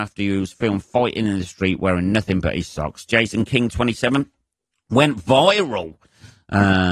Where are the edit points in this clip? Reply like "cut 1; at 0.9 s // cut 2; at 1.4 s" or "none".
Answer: none